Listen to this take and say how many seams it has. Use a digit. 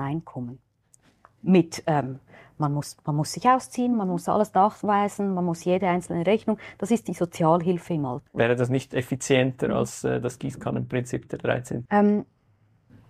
2